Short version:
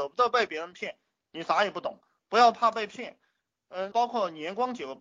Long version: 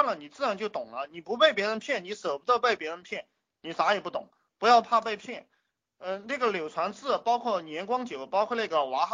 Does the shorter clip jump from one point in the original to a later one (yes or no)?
yes